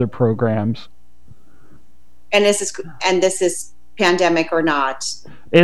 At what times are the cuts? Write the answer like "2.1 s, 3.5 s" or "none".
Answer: 3.0 s

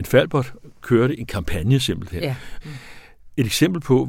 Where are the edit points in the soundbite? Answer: 2.6 s

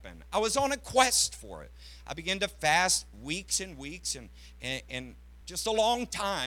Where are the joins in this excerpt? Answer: 5.4 s

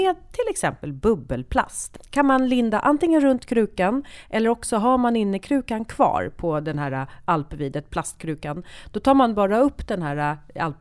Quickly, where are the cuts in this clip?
none

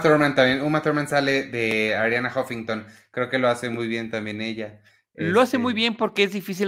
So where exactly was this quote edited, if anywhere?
none

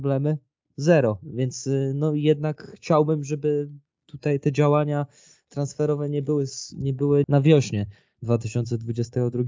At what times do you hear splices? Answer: 7.2 s

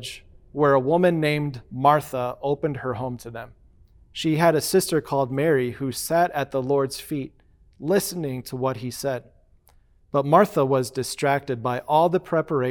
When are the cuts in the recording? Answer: none

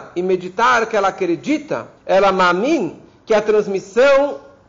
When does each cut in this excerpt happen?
2.0 s

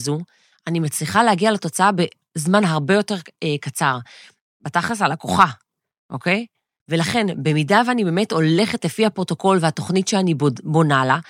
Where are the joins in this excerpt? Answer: 4.4 s, 6.8 s

